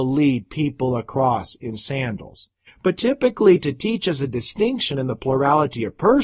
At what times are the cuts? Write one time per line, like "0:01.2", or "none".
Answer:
0:02.7